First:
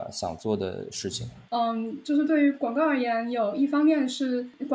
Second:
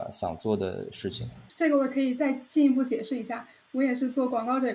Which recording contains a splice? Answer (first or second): first